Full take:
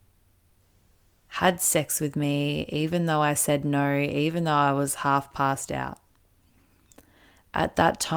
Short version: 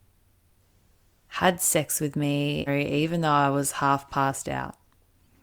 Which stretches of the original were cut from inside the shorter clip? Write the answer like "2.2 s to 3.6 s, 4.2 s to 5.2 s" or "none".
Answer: 2.7 s to 3.9 s